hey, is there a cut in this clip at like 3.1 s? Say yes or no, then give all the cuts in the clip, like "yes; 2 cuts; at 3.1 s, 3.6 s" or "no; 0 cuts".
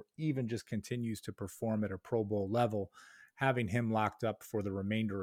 no; 0 cuts